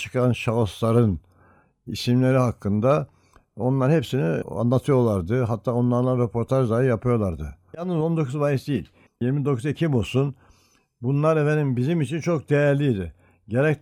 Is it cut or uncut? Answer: cut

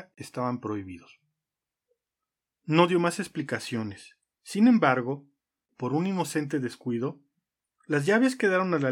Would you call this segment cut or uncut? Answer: cut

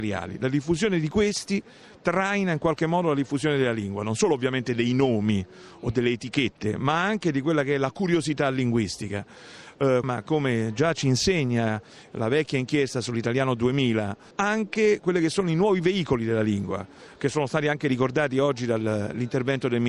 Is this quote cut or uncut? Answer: cut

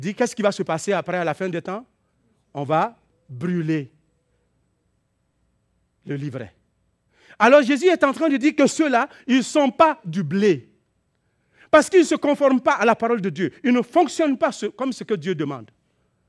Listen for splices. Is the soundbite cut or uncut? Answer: uncut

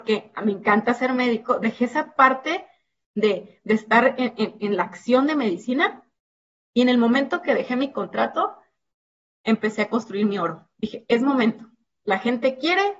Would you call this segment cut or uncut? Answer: uncut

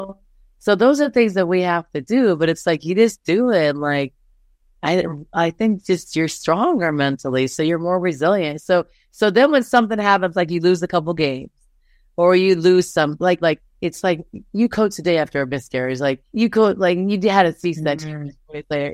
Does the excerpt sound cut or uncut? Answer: cut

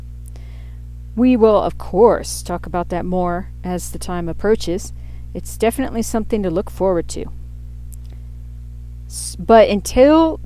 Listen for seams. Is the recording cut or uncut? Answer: uncut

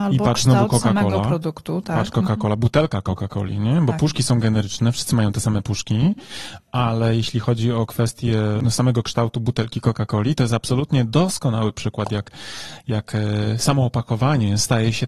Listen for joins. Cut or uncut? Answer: uncut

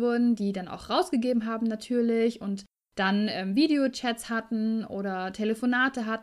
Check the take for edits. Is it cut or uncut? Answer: uncut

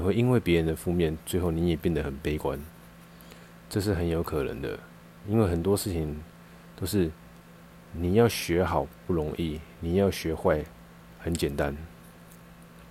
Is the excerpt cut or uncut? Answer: cut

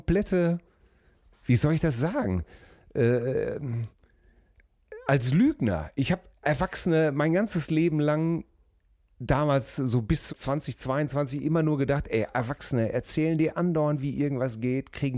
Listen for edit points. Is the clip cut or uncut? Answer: cut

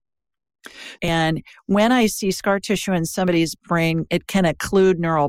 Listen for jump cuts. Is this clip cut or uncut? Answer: cut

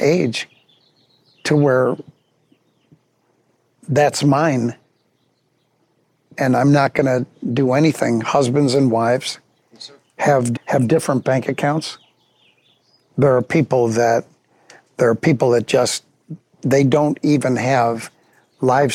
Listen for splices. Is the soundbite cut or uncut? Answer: cut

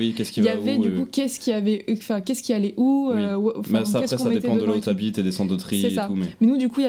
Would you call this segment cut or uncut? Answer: uncut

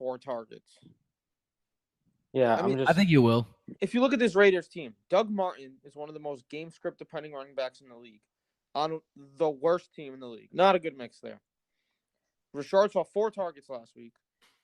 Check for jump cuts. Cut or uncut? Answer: cut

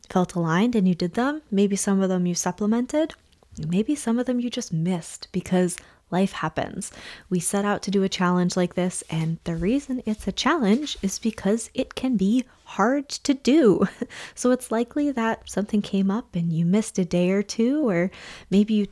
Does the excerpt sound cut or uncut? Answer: uncut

